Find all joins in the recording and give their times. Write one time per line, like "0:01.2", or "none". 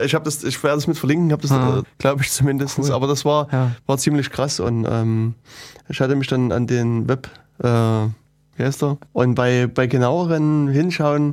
0:01.8
0:09.1